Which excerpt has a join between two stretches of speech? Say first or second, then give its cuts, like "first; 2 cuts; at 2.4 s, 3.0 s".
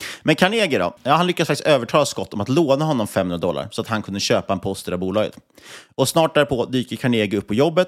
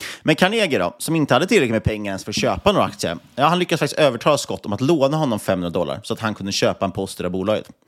first; 1 cut; at 1.0 s